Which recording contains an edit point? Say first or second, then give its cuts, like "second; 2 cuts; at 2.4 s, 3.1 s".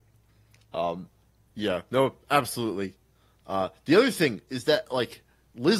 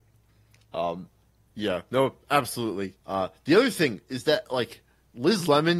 second; 1 cut; at 3.0 s